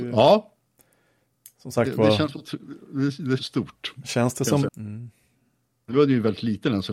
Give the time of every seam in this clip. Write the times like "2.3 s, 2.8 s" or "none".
3.4 s, 4.7 s